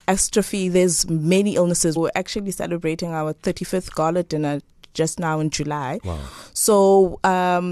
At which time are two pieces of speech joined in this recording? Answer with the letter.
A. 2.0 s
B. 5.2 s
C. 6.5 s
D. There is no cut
A